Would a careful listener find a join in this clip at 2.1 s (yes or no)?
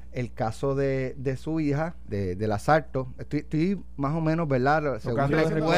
yes